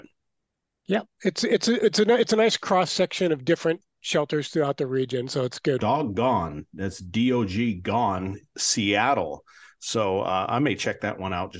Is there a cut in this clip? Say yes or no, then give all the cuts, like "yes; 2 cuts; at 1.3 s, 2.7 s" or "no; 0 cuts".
yes; 1 cut; at 5.8 s